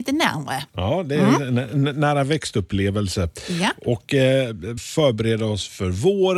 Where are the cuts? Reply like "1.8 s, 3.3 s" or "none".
4.8 s